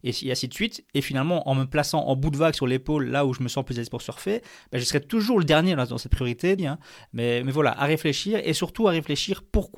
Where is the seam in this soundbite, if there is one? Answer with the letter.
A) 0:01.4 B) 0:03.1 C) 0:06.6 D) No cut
C